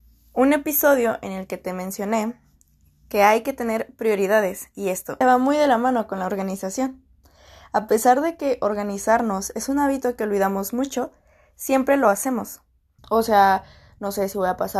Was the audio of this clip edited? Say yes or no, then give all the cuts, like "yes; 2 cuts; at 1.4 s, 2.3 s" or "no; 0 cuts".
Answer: yes; 2 cuts; at 5.2 s, 13.0 s